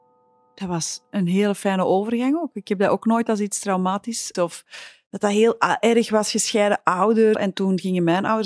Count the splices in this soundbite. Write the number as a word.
two